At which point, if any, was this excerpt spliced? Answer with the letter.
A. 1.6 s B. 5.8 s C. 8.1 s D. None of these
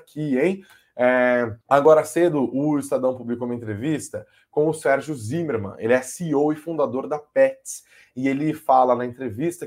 A